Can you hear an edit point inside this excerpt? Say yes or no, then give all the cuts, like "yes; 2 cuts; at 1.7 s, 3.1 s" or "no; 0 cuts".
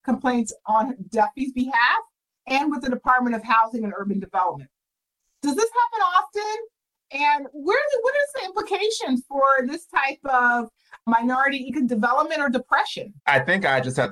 yes; 1 cut; at 13.2 s